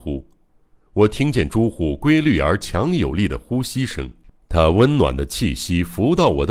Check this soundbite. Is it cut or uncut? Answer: uncut